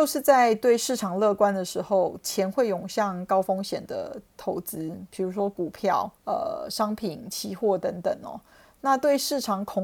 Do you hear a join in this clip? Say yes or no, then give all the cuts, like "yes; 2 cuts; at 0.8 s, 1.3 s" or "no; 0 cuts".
yes; 1 cut; at 6.1 s